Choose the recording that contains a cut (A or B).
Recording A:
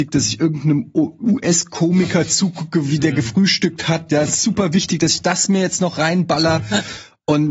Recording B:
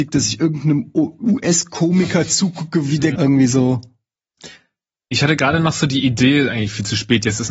B